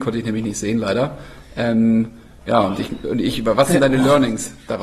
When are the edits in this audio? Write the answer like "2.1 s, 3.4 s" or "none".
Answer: none